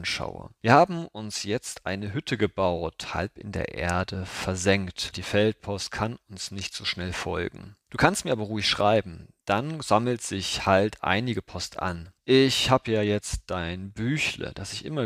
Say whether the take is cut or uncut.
cut